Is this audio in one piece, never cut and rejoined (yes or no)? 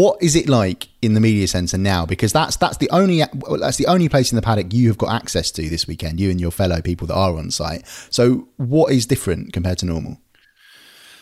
yes